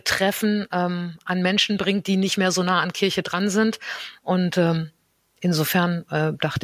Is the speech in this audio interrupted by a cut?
no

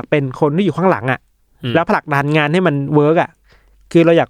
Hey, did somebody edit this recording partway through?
no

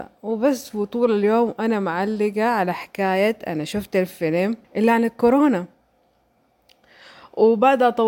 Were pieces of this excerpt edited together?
yes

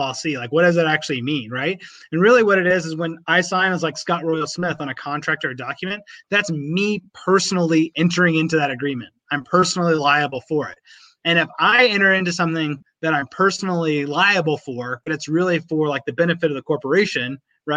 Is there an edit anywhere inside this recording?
no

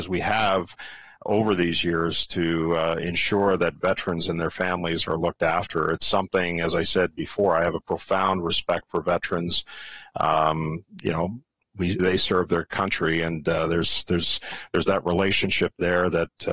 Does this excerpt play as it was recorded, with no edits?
no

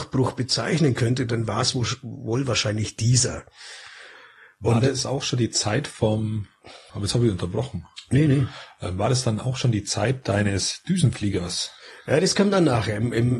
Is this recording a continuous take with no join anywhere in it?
no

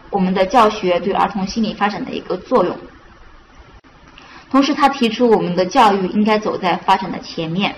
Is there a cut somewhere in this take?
no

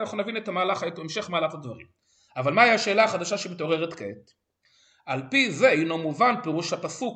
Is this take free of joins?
yes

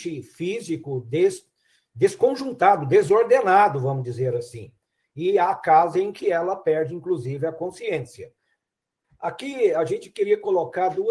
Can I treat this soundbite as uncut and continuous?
no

